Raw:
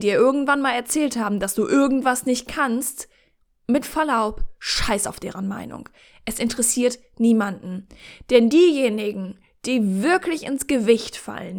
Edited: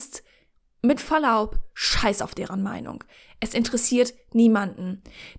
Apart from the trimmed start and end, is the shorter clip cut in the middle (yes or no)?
no